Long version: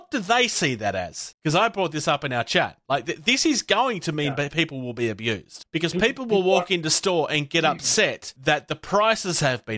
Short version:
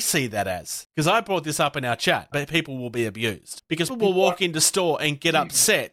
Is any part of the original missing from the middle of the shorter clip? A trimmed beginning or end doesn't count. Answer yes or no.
yes